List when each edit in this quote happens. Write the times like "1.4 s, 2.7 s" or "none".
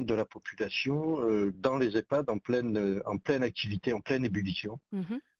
none